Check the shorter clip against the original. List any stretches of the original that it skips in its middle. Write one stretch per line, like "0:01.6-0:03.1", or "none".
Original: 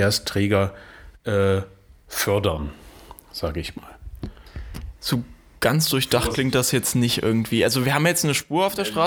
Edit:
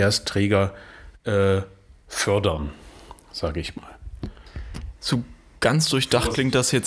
none